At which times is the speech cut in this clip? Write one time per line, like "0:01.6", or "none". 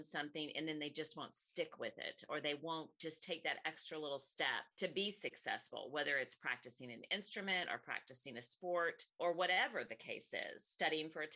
0:04.7
0:09.1